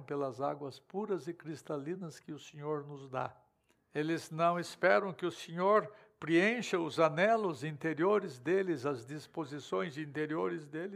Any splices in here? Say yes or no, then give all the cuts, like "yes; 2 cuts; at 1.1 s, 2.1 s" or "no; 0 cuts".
yes; 1 cut; at 3.8 s